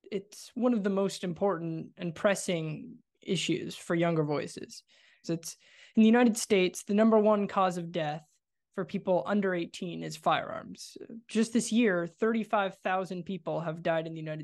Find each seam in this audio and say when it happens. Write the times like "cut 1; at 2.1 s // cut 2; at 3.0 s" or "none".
cut 1; at 5.2 s